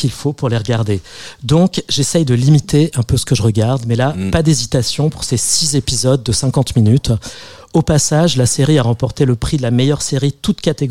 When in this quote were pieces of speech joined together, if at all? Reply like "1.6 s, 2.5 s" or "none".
none